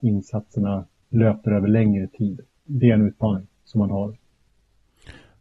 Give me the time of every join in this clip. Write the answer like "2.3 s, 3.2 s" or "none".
none